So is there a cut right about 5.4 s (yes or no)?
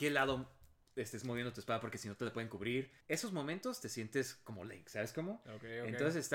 no